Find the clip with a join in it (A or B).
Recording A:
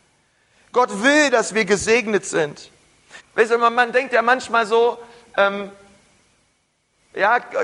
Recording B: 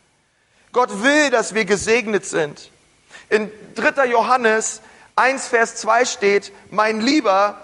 A